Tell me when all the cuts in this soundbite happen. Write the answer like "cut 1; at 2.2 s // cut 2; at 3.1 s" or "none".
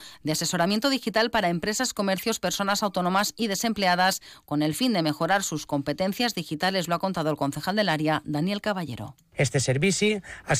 none